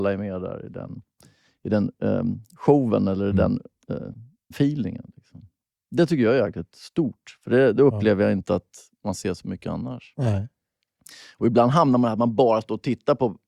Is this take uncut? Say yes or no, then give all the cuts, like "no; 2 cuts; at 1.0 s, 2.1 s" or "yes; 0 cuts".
no; 1 cut; at 4.5 s